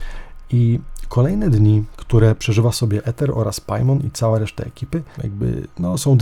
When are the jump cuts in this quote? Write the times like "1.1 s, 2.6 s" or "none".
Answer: 5.2 s